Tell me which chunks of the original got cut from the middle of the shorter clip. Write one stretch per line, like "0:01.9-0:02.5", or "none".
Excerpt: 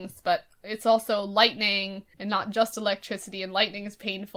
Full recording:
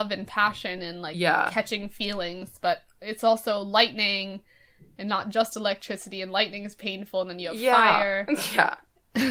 0:04.5-0:04.9